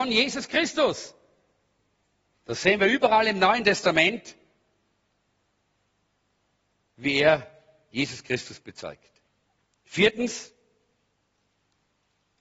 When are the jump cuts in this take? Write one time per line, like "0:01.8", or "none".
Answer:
none